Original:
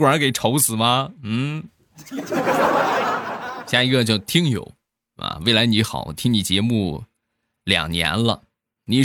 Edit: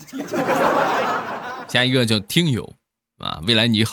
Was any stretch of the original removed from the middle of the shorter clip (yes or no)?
no